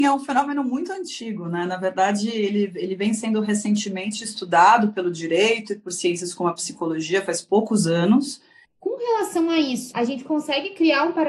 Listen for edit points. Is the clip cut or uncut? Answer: cut